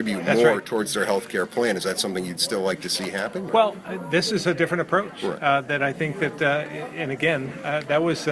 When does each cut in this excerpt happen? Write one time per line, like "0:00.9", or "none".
none